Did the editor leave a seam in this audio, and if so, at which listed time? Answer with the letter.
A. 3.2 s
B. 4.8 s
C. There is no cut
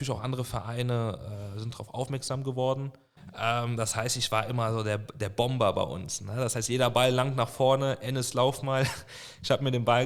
A